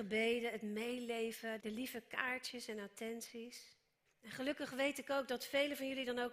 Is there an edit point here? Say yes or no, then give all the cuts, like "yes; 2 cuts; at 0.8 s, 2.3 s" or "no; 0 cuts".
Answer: yes; 2 cuts; at 1.6 s, 4.1 s